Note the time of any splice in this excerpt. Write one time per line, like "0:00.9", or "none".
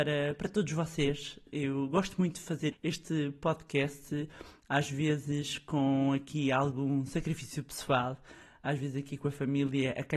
0:01.5
0:02.7